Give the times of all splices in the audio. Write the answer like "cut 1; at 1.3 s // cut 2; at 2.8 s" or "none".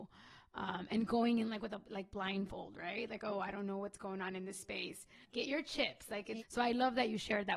cut 1; at 5.2 s // cut 2; at 6.4 s